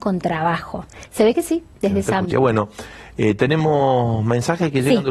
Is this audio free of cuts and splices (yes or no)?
no